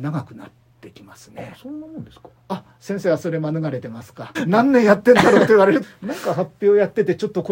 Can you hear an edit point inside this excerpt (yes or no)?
yes